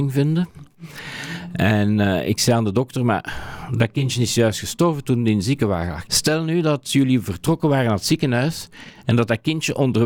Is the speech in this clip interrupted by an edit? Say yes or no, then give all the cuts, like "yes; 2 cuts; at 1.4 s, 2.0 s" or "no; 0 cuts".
yes; 1 cut; at 6.1 s